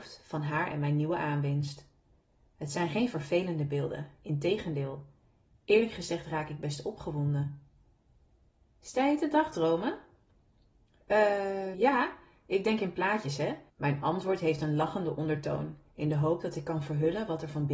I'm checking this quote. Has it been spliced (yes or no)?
yes